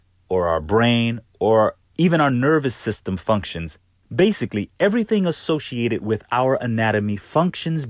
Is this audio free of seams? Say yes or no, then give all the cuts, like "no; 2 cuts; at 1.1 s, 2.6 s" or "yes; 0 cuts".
yes; 0 cuts